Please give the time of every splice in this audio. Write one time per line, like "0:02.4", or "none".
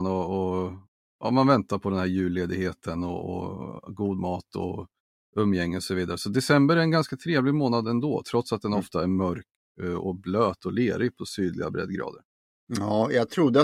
none